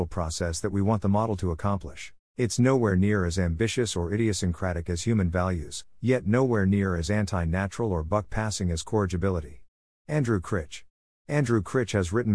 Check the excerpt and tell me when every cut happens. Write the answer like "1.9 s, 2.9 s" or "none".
2.2 s